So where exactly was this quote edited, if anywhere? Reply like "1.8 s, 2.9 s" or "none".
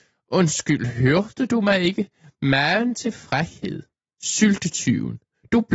4.1 s